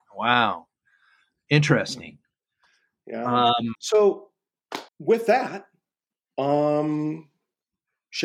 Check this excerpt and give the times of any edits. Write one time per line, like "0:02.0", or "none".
0:03.7
0:04.9